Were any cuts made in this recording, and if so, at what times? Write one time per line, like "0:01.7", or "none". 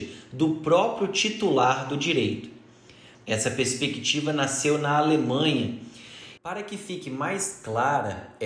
0:03.1
0:06.4